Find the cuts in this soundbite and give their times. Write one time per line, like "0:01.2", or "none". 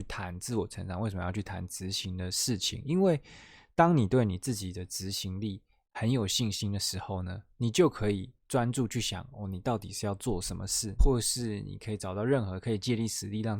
0:11.0